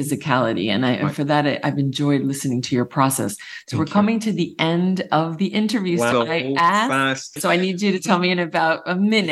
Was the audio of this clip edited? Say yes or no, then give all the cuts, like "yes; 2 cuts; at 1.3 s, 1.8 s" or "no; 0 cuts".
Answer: yes; 2 cuts; at 6.1 s, 7.4 s